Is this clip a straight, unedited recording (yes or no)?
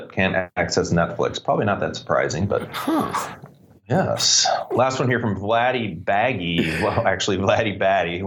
yes